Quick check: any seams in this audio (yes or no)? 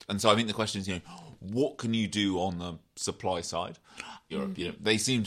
yes